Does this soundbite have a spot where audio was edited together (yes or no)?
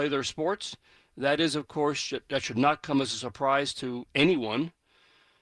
no